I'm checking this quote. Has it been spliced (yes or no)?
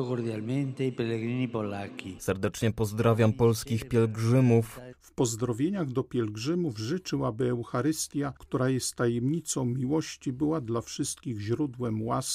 yes